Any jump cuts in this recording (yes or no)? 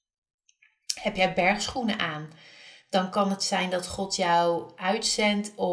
no